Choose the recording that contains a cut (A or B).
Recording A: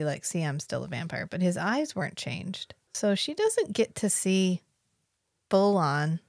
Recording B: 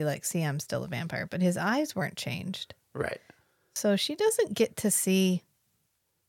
A